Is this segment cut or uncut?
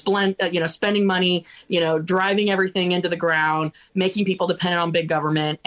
uncut